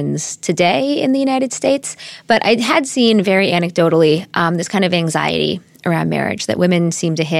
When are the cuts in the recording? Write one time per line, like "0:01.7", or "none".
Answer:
none